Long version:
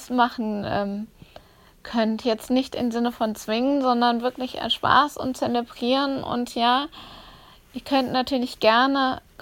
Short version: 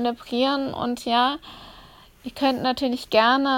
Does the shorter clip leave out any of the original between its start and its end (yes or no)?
no